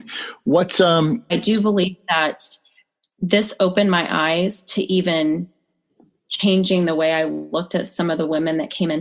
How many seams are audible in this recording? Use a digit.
1